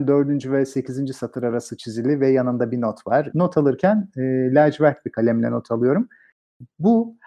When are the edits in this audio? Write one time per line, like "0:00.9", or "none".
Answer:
0:03.3